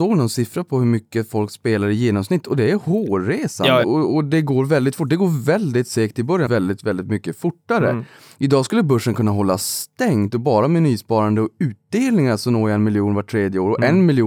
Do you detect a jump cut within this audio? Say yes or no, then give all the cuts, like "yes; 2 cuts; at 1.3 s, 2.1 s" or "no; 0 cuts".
yes; 2 cuts; at 3.8 s, 6.5 s